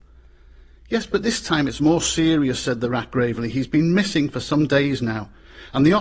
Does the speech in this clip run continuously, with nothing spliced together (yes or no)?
yes